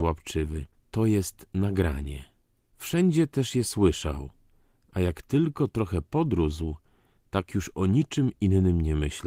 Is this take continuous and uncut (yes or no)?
yes